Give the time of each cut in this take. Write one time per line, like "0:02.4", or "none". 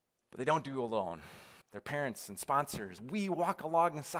0:01.6
0:03.0